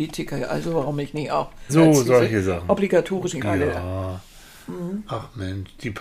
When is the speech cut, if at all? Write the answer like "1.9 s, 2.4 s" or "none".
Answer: 1.7 s, 3.4 s